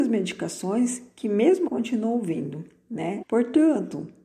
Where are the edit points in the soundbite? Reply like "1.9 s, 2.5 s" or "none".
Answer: 1.7 s, 3.2 s